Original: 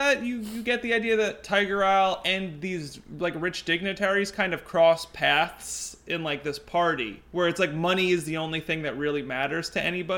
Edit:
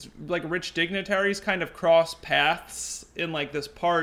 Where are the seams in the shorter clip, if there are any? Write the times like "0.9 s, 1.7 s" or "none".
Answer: none